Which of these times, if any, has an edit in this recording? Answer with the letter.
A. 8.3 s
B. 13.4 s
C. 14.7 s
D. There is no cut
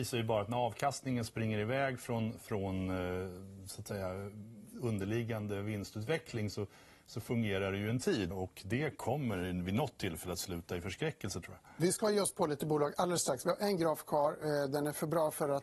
A